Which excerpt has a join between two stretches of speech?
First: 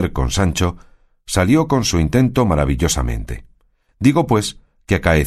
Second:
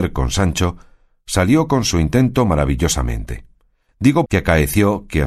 second; 1 cut; at 4.3 s

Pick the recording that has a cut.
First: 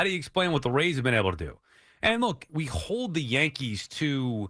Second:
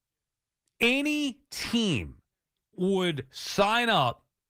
first; 1 cut; at 2.5 s

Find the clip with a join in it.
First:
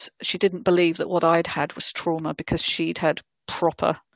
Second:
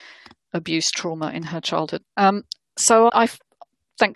second; 2 cuts; at 2.0 s, 3.1 s

